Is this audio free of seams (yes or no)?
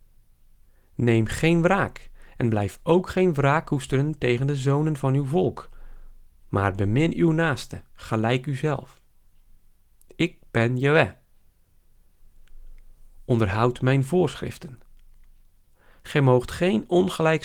yes